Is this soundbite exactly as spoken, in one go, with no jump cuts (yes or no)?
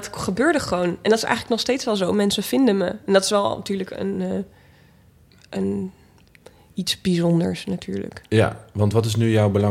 yes